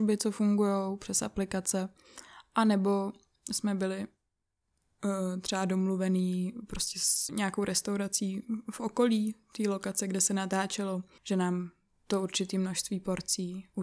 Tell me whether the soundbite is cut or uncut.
cut